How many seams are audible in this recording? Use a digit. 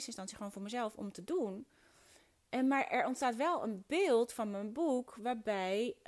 0